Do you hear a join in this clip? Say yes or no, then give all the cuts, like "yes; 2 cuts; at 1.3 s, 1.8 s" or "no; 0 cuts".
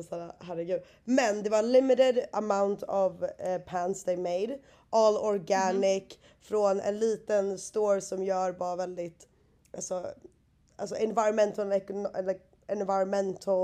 no; 0 cuts